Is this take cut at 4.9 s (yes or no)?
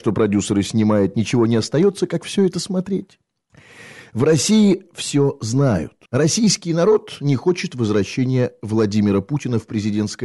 yes